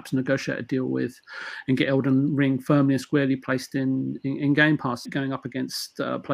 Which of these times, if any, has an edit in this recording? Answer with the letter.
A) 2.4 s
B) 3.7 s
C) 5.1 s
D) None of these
C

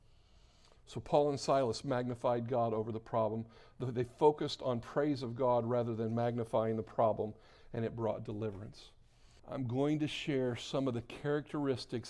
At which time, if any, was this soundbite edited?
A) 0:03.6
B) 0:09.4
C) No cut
B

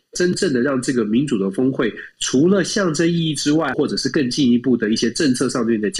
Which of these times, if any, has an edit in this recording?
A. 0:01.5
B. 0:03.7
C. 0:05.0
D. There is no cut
B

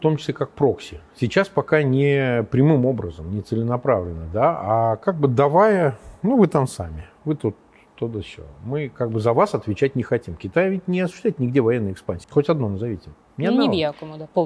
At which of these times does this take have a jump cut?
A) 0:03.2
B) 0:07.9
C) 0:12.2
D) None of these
C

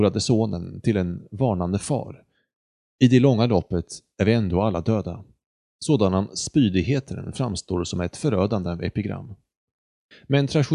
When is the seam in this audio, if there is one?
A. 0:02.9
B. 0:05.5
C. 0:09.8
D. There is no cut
D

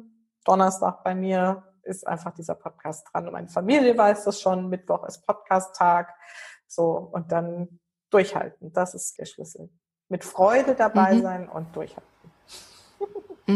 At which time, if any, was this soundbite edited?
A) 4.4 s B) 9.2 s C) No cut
B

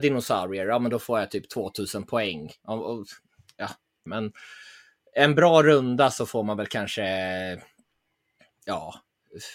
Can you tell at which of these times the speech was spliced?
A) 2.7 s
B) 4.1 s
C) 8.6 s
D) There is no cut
B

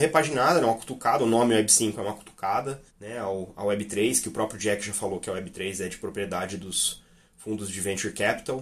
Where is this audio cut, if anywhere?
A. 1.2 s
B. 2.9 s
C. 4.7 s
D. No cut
B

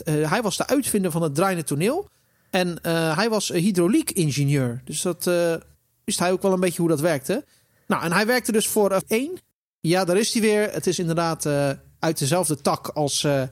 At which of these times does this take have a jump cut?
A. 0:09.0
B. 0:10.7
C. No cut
A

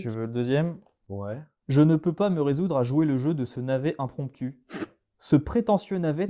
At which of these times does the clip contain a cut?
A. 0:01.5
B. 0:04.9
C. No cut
C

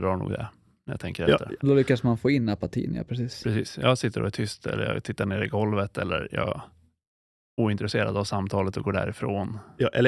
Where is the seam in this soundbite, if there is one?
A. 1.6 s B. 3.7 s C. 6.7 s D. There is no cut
A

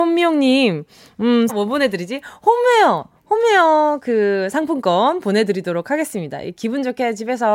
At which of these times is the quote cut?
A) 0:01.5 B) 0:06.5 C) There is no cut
A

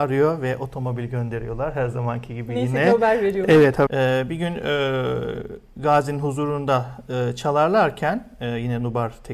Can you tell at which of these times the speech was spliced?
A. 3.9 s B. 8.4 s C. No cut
A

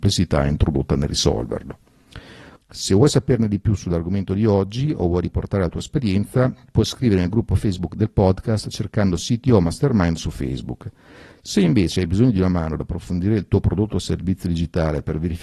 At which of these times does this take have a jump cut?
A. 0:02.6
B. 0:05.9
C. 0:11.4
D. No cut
A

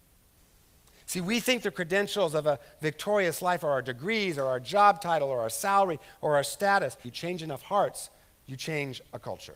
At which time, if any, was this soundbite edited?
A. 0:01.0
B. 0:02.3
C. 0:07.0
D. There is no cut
C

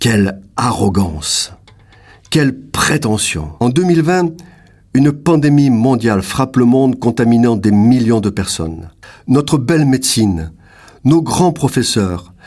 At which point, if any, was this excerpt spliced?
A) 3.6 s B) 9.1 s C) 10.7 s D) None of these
A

